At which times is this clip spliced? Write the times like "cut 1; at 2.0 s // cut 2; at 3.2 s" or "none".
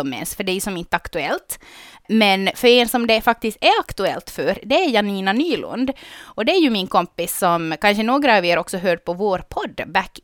none